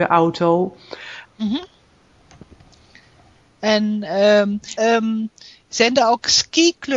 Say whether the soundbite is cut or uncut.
cut